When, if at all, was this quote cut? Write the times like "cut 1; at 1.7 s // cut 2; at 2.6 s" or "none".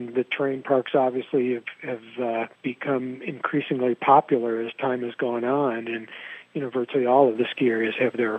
none